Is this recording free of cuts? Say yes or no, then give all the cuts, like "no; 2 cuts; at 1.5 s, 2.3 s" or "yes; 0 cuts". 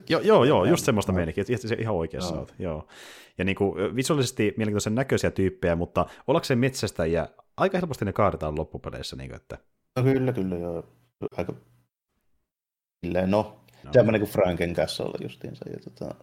no; 1 cut; at 13.8 s